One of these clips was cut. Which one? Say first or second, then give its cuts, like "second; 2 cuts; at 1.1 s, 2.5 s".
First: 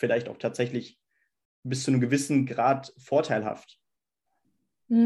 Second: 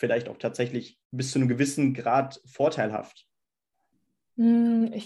second; 1 cut; at 1.0 s